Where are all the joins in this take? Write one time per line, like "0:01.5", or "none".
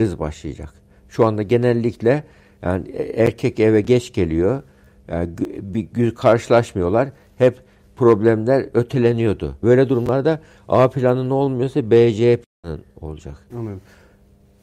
0:09.6
0:13.5